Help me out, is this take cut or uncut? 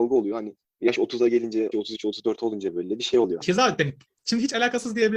cut